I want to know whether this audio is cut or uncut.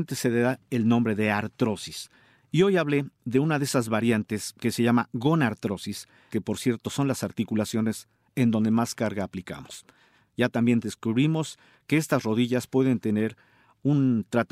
cut